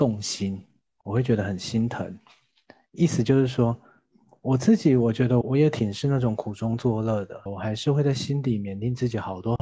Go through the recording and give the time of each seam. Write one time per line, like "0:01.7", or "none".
0:05.4
0:07.5